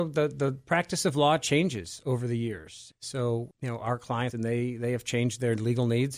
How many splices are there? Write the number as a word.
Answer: one